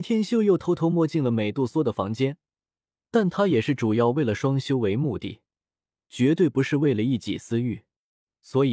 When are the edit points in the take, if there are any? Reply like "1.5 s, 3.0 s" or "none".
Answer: 3.0 s